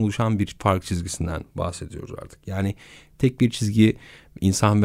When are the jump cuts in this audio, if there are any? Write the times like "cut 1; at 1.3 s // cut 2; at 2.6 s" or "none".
none